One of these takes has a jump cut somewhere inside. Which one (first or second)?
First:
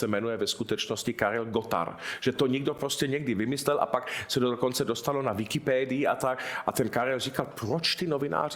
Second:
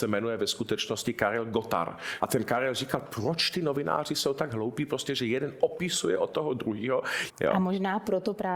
second